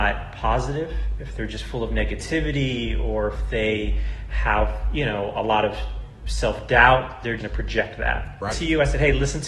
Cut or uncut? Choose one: cut